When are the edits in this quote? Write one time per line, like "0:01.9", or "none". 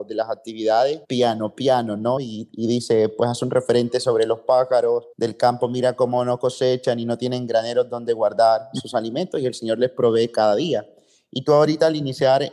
0:01.0
0:02.2
0:05.1